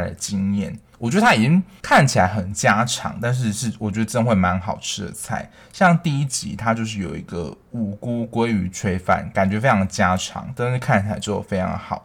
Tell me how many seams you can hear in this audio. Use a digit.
1